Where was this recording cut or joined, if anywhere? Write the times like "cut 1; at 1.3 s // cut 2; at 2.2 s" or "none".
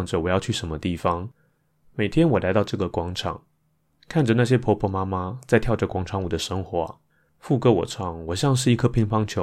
none